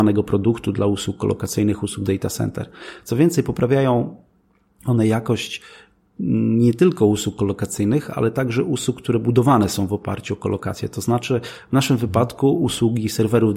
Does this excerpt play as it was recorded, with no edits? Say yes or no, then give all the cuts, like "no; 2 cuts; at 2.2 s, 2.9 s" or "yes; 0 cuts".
yes; 0 cuts